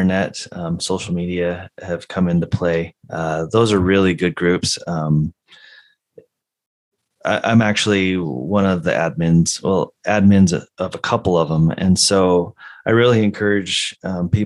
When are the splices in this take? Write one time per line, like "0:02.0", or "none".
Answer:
0:03.0